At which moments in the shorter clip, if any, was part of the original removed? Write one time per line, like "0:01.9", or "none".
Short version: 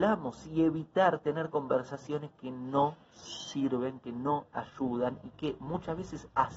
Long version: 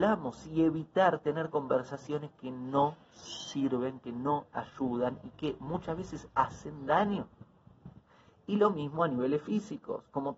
none